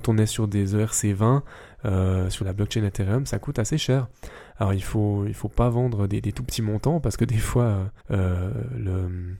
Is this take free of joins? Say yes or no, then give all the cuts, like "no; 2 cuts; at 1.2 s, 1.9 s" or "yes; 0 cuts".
no; 2 cuts; at 2.4 s, 8.0 s